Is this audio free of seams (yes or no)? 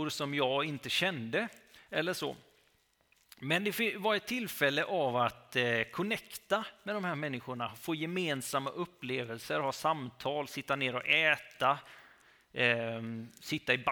no